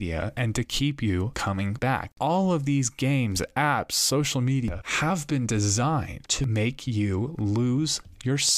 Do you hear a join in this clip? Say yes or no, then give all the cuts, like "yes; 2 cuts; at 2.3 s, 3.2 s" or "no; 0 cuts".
no; 0 cuts